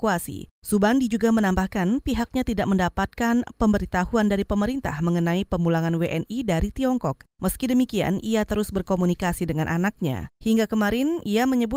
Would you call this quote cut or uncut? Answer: uncut